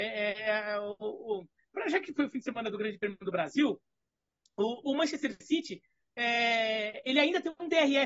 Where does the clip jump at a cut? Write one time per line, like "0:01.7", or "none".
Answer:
none